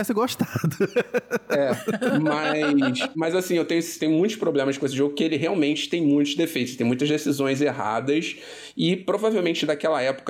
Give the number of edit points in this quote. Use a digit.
0